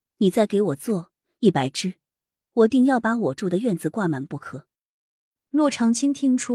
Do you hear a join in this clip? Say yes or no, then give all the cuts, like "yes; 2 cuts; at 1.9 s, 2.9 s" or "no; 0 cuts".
no; 0 cuts